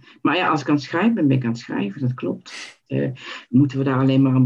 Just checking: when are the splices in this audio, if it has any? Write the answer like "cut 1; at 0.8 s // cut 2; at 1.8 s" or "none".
cut 1; at 2.9 s